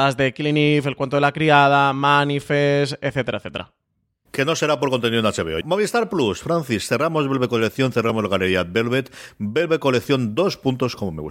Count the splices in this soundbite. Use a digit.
1